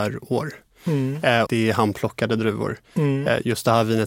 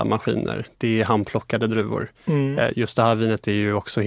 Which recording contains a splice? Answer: first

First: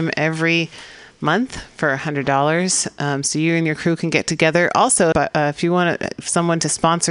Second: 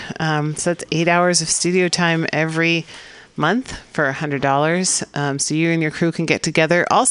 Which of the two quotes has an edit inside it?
first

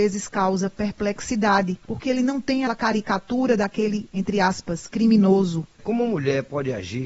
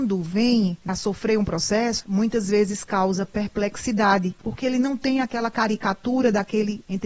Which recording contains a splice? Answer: first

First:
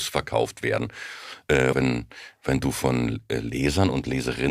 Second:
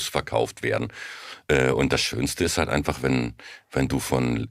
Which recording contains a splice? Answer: first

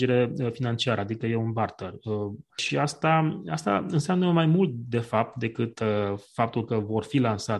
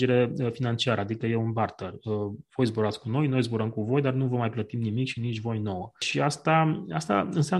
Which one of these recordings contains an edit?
first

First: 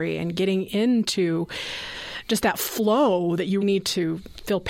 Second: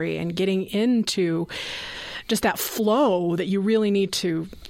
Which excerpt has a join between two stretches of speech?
first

